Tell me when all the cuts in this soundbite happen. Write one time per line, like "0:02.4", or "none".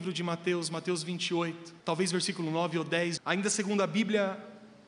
0:01.8
0:03.2